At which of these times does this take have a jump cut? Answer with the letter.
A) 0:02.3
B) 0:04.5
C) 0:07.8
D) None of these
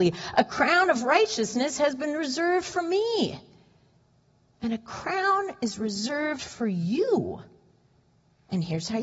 D